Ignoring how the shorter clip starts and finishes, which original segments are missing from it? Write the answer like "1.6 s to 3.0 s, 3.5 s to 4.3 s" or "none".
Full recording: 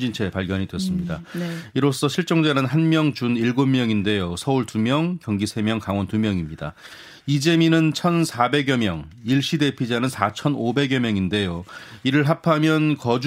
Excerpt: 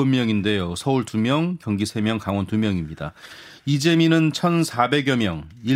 none